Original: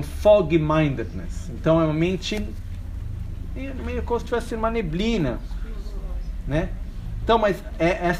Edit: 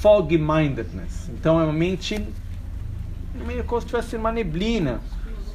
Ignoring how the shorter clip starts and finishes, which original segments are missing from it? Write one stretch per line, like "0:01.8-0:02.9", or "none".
0:03.5-0:03.7